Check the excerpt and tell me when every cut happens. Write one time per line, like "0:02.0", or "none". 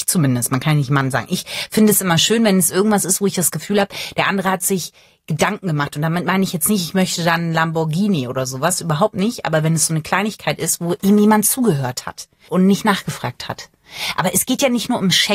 0:12.5